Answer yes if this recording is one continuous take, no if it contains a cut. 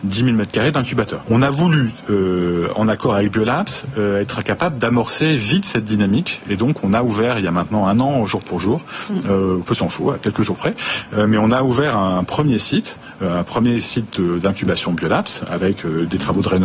no